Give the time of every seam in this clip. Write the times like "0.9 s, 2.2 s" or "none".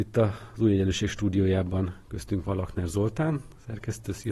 none